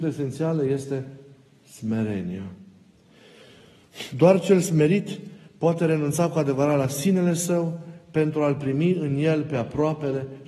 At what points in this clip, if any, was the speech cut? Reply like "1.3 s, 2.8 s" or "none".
none

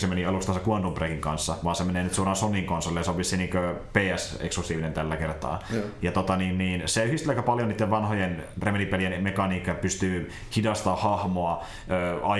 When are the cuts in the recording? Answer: none

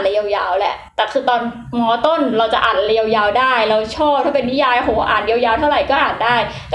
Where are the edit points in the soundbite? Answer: none

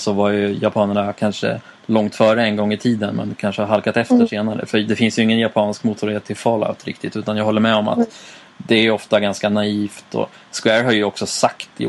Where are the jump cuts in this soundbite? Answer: none

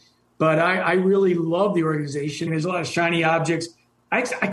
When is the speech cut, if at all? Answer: 2.5 s

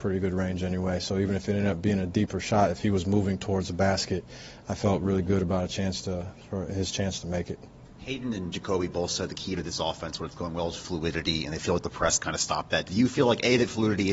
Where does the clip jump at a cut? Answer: none

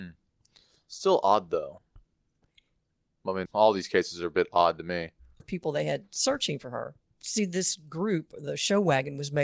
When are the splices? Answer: 3.5 s, 5.4 s, 7.1 s

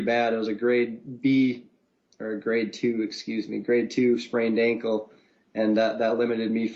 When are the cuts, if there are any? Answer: none

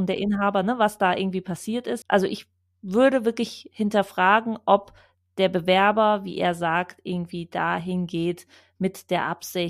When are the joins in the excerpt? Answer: 2.0 s

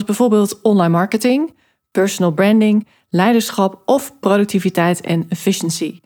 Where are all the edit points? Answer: none

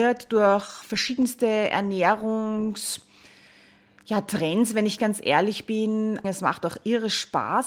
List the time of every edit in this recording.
6.2 s

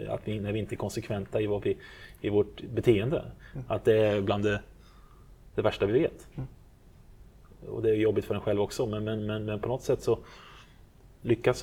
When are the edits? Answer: none

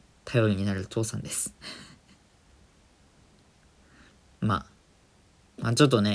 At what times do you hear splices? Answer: none

